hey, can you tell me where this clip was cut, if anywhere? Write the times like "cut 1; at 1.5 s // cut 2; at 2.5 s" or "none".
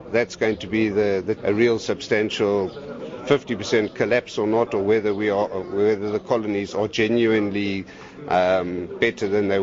cut 1; at 1.4 s